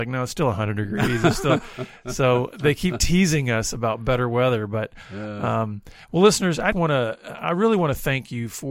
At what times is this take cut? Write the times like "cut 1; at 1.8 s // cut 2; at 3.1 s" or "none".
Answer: cut 1; at 6.7 s